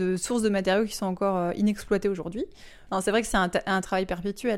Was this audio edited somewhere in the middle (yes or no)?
no